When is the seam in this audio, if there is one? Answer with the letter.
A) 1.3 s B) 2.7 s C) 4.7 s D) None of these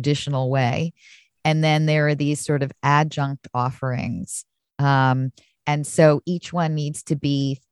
D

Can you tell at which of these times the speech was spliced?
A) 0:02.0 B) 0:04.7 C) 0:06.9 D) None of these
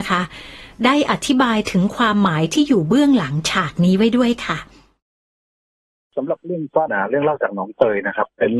C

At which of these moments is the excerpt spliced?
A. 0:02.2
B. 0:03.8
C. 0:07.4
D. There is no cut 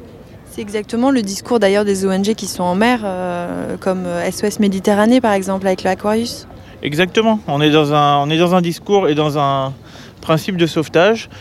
D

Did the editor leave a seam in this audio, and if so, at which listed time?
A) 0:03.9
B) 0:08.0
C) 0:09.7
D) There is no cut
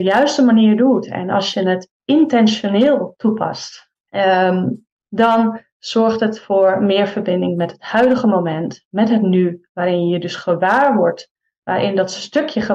A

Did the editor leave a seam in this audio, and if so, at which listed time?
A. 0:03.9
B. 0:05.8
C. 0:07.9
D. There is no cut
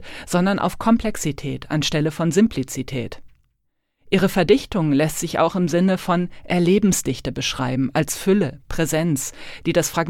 D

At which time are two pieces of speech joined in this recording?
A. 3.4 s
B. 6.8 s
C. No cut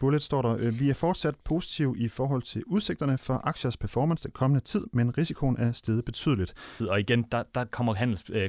B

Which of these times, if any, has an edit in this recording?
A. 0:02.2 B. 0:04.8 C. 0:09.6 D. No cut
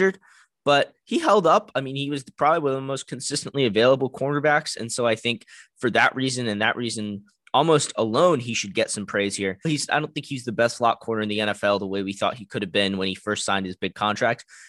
C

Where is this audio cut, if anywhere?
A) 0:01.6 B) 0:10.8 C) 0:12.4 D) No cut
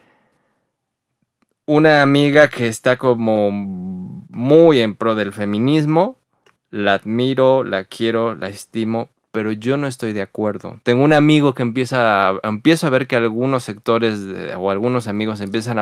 D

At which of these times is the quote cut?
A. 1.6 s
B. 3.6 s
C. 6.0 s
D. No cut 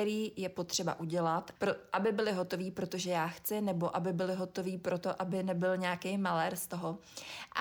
A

